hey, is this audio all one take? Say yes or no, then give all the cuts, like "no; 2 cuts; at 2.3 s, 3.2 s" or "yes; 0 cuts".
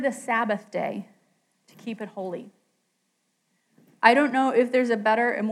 yes; 0 cuts